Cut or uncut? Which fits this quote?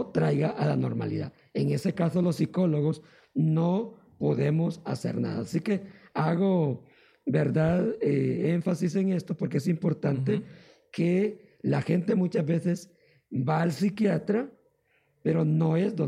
uncut